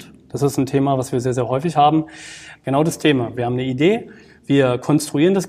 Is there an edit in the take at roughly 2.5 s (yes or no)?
yes